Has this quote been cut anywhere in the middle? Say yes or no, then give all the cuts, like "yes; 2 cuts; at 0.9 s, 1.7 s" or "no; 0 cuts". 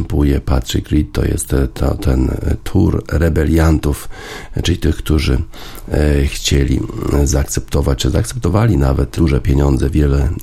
yes; 1 cut; at 9.2 s